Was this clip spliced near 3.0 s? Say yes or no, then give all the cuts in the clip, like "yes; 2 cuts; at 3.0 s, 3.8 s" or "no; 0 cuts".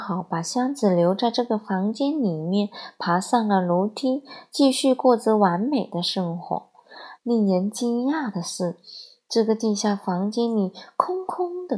no; 1 cut; at 7.2 s